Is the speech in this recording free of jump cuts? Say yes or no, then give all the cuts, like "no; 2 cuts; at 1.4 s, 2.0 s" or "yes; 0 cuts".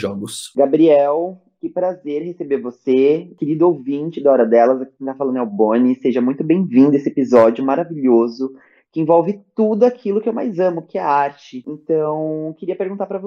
yes; 0 cuts